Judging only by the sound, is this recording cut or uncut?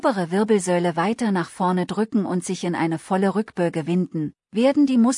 uncut